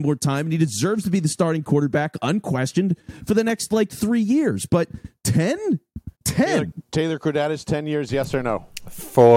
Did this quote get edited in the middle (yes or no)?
yes